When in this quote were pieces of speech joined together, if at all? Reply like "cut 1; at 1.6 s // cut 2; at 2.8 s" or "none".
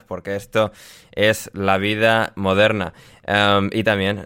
none